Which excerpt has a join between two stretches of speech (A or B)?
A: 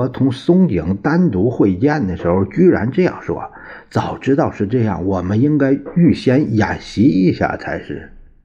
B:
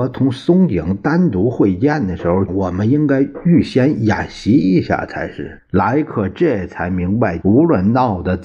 B